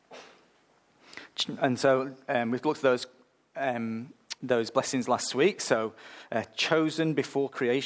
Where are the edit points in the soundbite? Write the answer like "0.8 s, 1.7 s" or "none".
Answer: 4.4 s